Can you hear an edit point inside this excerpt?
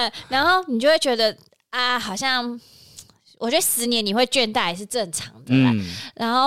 no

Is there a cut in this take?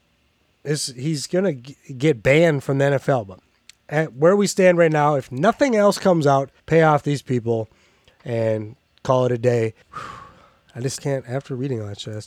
yes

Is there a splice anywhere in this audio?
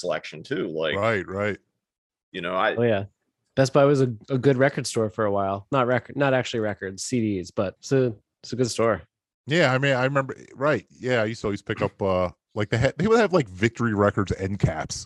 no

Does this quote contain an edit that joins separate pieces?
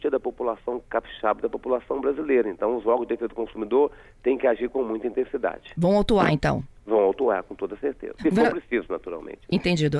yes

